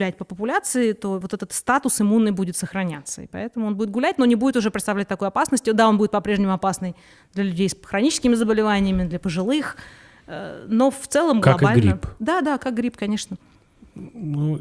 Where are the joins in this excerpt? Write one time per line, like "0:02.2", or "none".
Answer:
none